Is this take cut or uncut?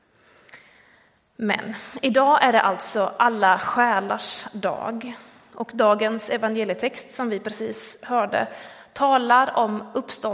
uncut